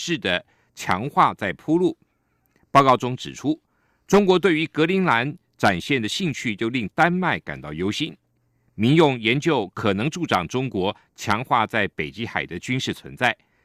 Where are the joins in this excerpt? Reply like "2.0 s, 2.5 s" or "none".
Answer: none

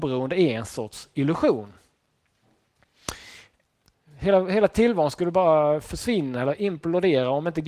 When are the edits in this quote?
3.9 s

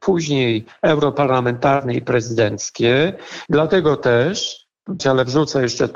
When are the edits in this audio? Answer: 3.5 s, 5.0 s

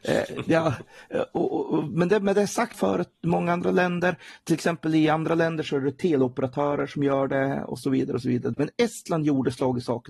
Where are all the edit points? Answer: 2.7 s, 8.5 s

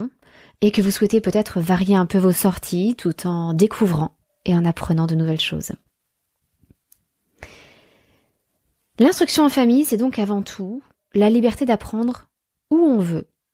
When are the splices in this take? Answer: none

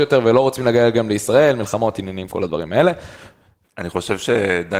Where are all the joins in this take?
3.6 s

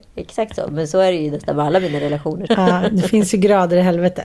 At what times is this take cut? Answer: 2.5 s

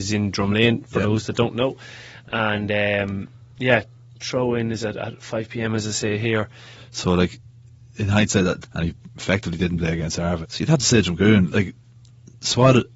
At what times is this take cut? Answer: 6.7 s, 8.6 s, 10.4 s

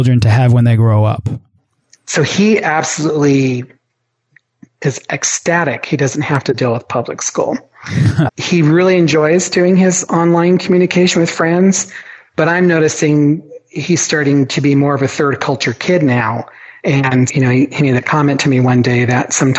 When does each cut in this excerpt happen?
8.3 s, 17.3 s

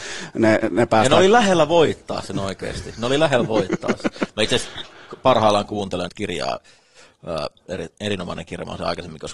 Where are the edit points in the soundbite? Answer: 6.1 s, 7.7 s

